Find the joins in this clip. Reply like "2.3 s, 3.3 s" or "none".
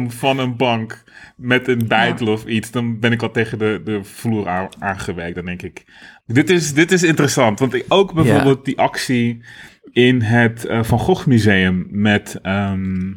6.2 s

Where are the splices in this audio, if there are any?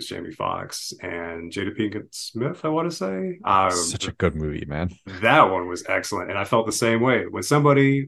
none

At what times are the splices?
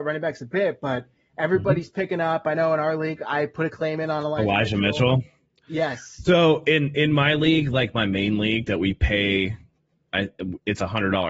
none

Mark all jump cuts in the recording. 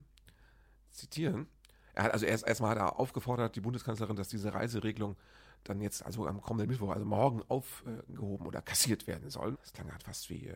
9.5 s

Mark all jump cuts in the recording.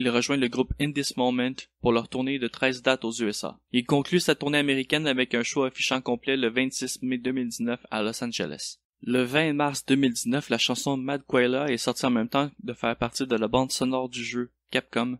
3.7 s, 8.9 s

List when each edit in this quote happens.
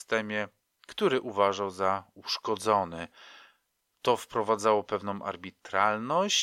none

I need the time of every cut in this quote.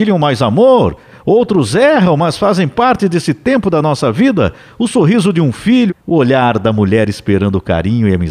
5.9 s

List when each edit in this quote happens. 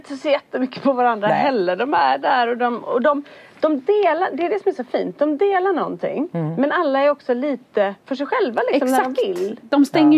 none

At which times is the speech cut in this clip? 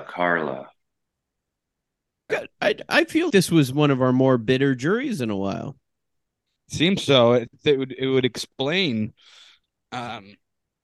2.3 s, 3.3 s

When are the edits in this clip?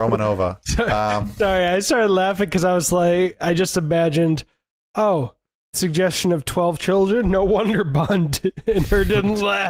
none

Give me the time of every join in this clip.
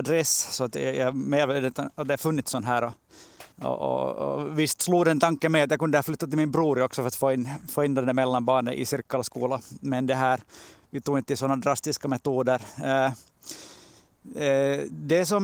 3.5 s

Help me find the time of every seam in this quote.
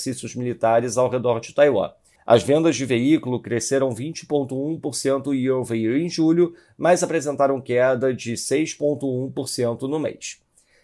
2.2 s

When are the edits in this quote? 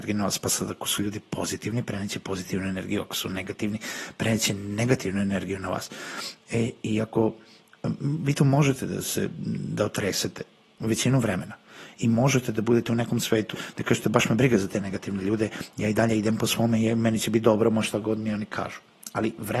13.5 s

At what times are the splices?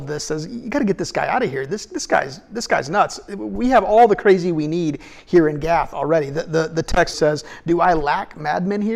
7.1 s

